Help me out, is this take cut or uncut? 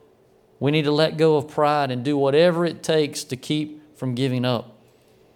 uncut